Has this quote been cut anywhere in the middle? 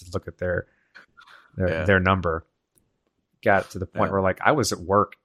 no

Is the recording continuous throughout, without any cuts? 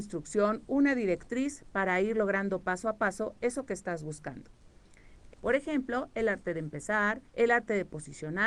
no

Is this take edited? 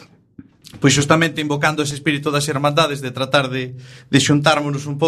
no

